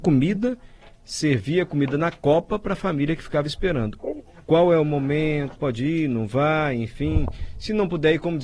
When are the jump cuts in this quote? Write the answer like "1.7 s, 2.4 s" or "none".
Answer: 4.0 s, 5.6 s